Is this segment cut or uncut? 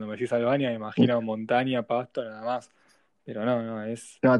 uncut